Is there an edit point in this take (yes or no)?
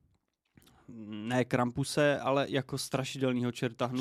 no